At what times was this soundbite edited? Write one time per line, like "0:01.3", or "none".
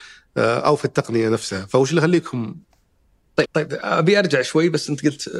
0:03.4